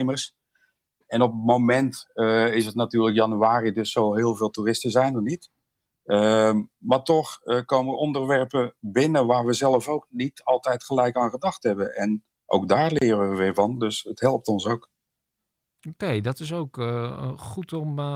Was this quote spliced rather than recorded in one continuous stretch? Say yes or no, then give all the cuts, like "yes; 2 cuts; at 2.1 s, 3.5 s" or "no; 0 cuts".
no; 0 cuts